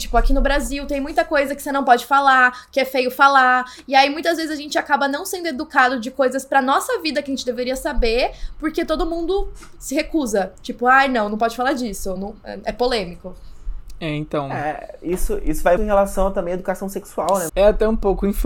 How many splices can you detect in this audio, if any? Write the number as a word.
three